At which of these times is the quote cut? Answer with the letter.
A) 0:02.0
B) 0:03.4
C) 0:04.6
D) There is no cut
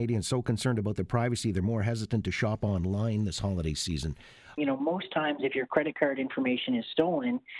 C